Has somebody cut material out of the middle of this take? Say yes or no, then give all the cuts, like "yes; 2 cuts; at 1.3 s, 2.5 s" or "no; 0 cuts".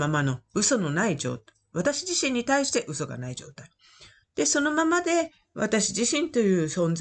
yes; 1 cut; at 4.2 s